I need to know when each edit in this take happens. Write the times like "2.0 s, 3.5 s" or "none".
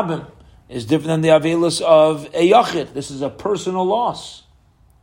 none